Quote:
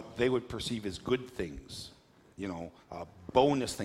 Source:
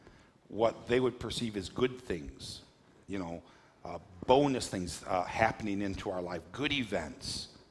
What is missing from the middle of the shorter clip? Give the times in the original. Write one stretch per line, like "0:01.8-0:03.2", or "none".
0:03.5-0:03.7